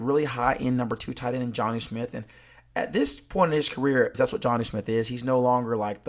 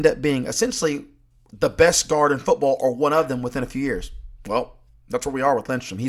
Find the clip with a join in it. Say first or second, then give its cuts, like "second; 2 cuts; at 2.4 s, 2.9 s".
first; 1 cut; at 4.1 s